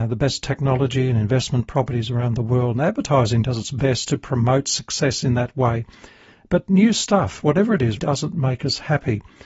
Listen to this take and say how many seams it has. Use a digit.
1